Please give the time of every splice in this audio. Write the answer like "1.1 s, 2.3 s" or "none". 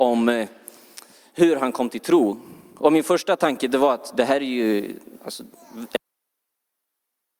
none